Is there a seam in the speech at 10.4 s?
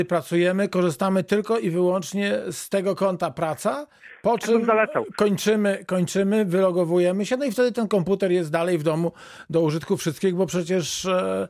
no; 0 cuts

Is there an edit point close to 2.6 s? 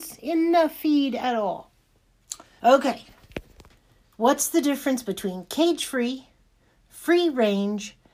yes; 1 cut; at 2.6 s

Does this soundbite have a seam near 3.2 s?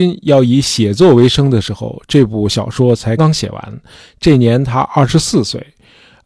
yes; 1 cut; at 3.2 s

